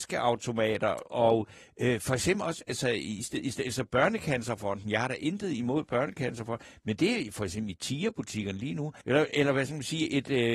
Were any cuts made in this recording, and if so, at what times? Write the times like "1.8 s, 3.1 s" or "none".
9.0 s